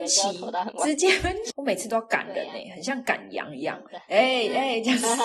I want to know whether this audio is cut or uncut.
cut